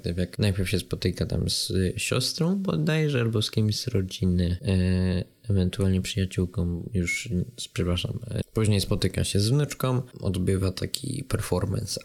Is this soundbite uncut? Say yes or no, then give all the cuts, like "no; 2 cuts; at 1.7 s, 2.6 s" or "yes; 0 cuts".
no; 2 cuts; at 8.4 s, 10.1 s